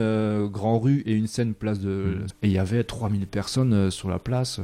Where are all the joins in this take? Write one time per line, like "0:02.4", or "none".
0:02.3